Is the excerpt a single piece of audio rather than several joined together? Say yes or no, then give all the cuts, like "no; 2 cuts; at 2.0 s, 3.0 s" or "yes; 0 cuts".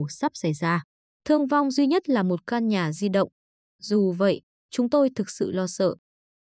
no; 1 cut; at 1.1 s